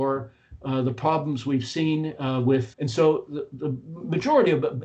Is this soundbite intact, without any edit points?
no; 1 cut; at 2.7 s

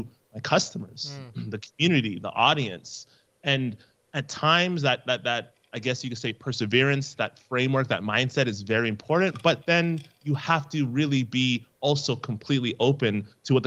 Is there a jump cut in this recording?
no; 0 cuts

